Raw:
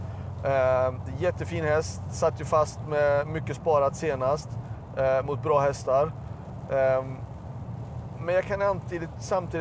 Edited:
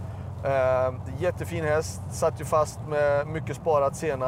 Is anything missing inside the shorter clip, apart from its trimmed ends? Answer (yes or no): no